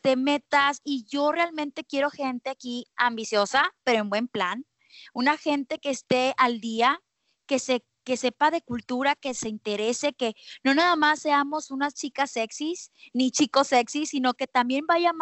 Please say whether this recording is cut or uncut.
uncut